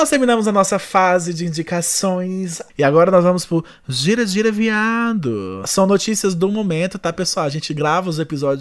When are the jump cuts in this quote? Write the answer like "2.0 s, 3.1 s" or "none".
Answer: 2.7 s